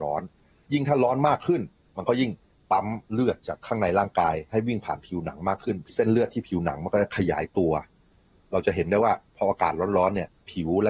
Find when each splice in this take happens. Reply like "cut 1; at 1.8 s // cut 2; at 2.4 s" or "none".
cut 1; at 3.0 s